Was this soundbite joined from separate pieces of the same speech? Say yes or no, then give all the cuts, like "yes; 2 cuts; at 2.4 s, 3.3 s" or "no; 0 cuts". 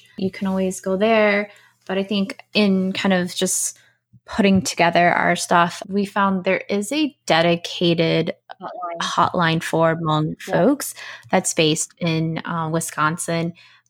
no; 0 cuts